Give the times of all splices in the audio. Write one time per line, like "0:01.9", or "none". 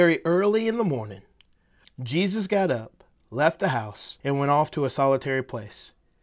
0:01.8
0:04.2